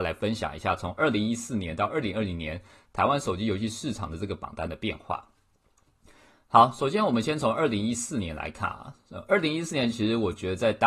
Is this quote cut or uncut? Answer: uncut